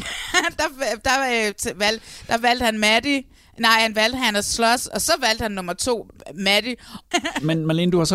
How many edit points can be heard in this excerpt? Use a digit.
1